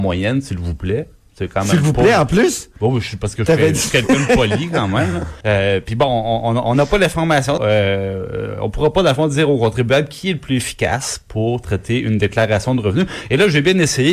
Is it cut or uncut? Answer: cut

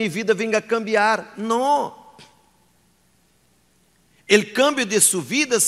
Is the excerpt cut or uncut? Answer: uncut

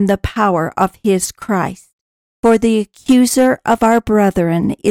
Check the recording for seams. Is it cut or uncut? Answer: uncut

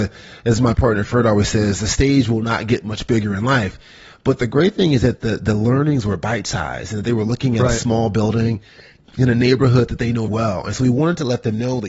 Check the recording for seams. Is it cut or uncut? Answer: cut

